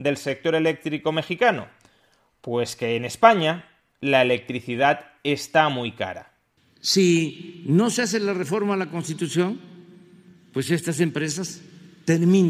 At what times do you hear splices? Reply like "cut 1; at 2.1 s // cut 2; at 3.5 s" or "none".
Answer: none